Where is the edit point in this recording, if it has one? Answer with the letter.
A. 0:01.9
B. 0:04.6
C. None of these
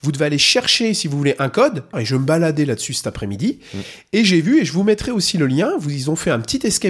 A